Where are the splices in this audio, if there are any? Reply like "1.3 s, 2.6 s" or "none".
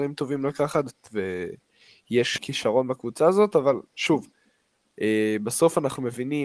2.4 s